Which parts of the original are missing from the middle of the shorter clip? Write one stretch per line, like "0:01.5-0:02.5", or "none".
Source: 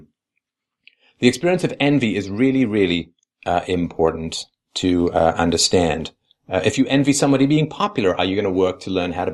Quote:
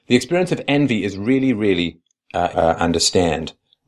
0:03.7-0:05.1